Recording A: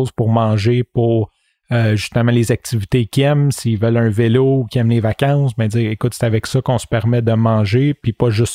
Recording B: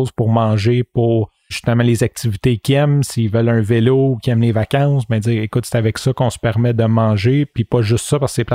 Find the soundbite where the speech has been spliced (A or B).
B